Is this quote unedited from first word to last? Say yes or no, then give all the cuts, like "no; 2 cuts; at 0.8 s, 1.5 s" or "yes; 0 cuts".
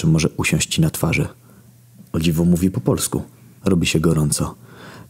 no; 2 cuts; at 2.0 s, 3.6 s